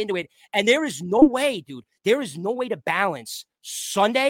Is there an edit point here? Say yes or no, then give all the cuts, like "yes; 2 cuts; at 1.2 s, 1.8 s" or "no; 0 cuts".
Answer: no; 0 cuts